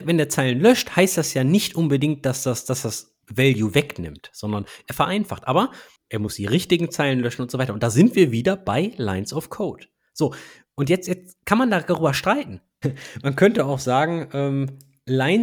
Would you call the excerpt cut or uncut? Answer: cut